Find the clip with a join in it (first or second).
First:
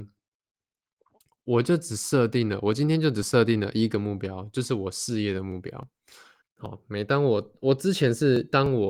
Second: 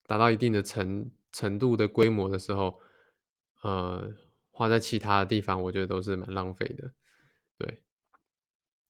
first